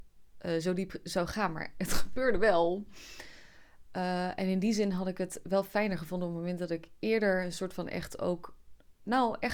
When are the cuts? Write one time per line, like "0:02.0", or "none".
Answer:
none